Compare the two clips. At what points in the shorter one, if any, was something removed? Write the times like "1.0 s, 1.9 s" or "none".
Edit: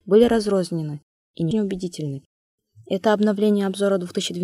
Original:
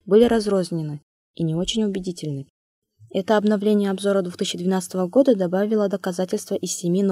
1.5 s

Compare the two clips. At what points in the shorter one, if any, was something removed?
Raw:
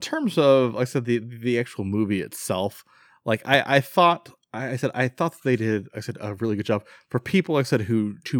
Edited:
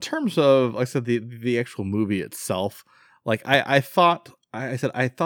none

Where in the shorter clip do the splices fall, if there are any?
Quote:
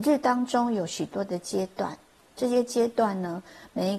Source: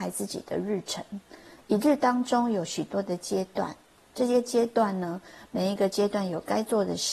none

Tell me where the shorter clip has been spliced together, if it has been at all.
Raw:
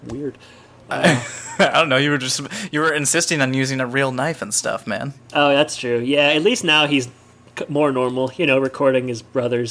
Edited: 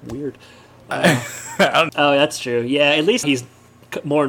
1.9 s, 3.2 s

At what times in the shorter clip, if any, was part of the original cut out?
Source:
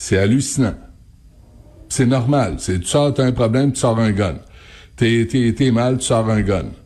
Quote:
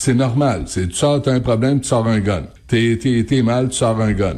2.6 s

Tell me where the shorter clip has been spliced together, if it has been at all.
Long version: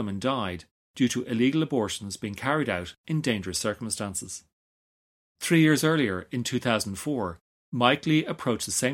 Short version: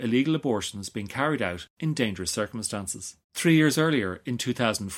3.2 s

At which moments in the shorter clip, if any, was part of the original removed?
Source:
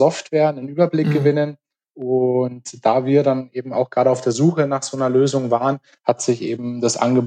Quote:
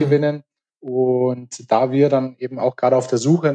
none

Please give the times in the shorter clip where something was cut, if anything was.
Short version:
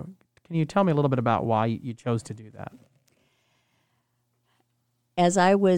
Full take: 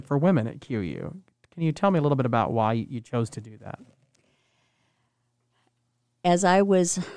none

